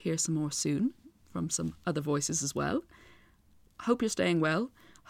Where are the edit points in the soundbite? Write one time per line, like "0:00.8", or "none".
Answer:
none